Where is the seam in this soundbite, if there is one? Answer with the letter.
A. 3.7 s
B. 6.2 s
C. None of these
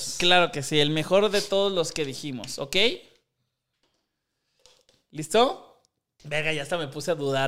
B